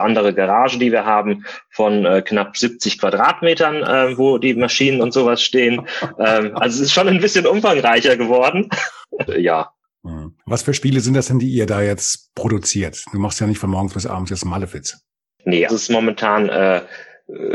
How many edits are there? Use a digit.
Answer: 2